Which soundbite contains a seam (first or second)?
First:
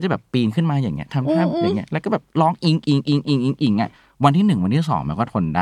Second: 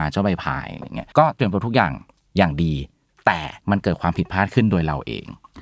second